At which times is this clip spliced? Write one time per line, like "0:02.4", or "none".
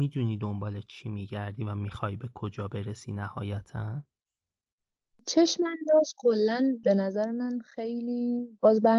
none